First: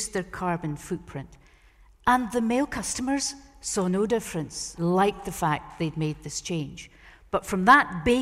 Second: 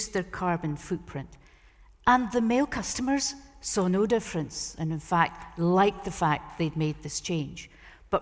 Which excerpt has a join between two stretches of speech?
first; 1 cut; at 4.7 s

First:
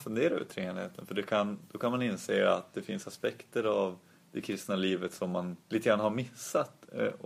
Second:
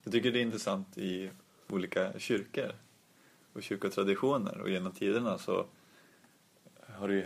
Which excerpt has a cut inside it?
first; 1 cut; at 5.6 s

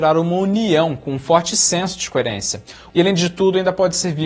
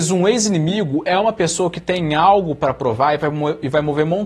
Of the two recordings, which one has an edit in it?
first; 1 cut; at 2.9 s

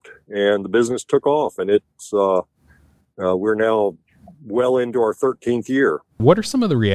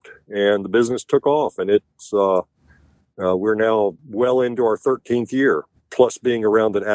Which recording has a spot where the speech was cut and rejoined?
second; 2 cuts; at 4.0 s, 5.8 s

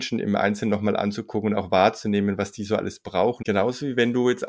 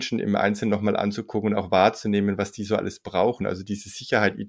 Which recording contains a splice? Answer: first; 1 cut; at 3.4 s

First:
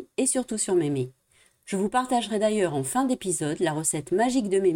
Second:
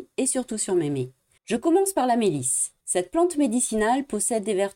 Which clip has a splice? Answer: second; 2 cuts; at 1.4 s, 2.8 s

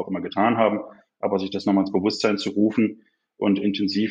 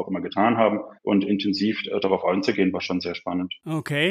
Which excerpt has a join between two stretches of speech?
second; 1 cut; at 1.0 s

